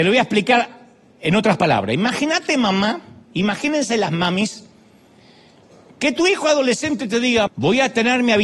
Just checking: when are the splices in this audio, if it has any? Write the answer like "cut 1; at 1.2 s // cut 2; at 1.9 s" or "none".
cut 1; at 7.5 s